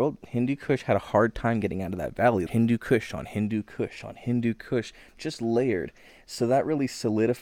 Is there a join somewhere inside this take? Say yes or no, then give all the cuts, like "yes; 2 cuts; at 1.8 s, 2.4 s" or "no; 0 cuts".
yes; 1 cut; at 2.5 s